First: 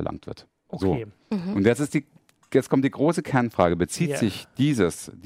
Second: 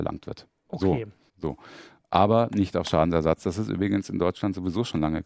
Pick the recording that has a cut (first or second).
second